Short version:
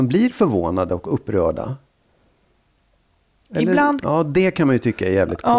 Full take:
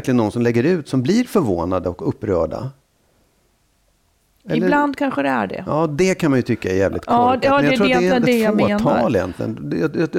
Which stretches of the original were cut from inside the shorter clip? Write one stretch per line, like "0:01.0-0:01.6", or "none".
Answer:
0:05.0-0:05.6